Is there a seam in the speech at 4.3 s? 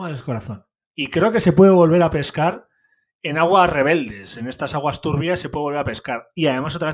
no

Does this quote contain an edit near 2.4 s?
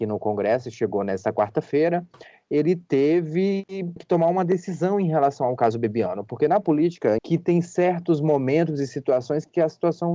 no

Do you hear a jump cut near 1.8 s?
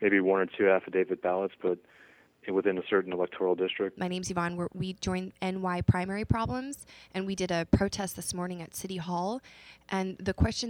no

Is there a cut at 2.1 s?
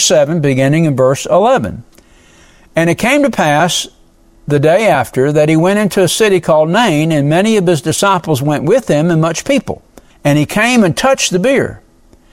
no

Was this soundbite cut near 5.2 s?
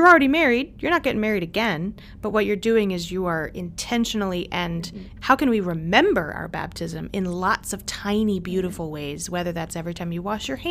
yes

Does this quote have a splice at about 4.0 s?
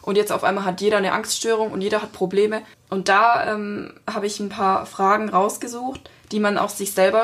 no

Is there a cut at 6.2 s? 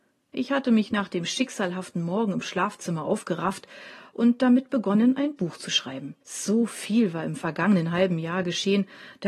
yes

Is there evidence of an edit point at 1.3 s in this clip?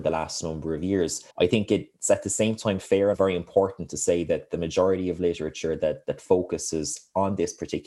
yes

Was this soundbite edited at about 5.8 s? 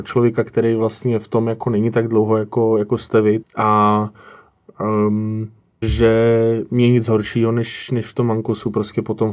yes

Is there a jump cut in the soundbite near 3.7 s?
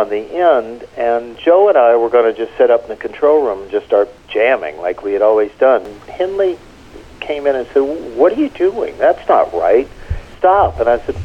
no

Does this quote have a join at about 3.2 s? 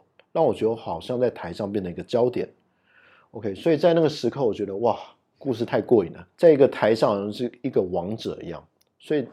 no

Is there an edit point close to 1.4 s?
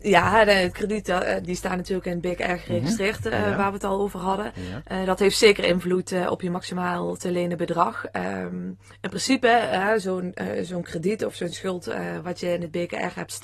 yes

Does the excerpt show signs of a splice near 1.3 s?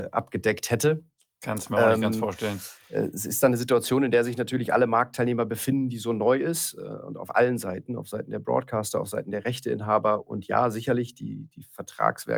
no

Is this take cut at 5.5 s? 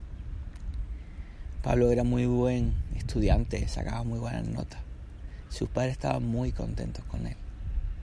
no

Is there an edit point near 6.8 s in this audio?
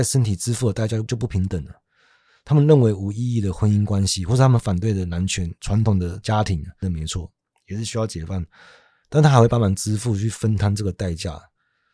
yes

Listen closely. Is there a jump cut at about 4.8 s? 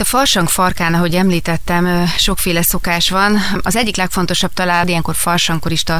yes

